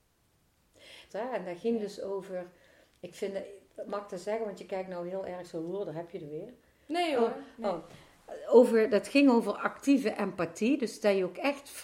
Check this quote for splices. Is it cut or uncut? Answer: cut